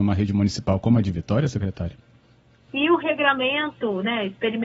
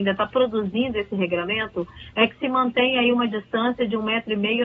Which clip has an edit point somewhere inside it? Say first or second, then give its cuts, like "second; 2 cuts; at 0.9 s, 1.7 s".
first; 1 cut; at 2.7 s